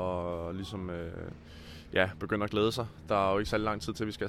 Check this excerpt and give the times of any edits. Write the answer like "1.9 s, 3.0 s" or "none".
none